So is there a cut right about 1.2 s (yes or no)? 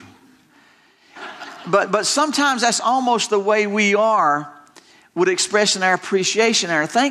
yes